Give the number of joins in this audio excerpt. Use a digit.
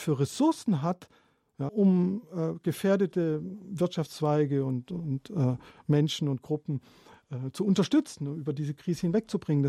1